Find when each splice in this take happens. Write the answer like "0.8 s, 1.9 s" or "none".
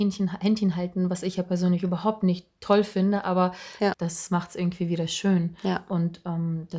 3.9 s